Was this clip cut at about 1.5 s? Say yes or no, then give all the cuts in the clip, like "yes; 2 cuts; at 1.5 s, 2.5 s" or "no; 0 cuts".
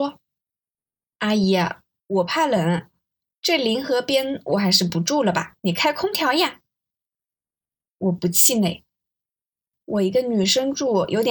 no; 2 cuts; at 5.6 s, 9.7 s